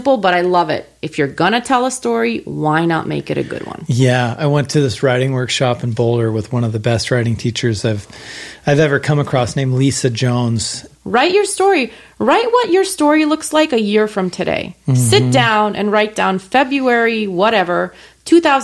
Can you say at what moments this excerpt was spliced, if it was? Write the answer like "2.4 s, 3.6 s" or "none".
10.9 s